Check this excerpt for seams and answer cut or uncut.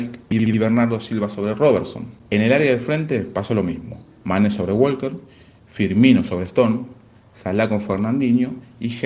uncut